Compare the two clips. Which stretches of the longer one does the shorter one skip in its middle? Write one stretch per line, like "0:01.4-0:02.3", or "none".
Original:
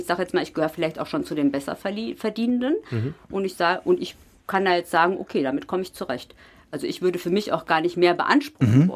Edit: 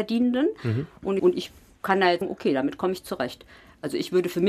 0:03.5-0:03.8
0:04.9-0:05.1